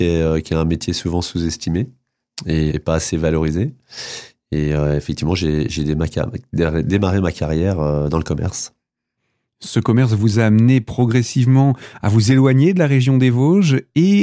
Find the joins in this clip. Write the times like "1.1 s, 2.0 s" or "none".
2.7 s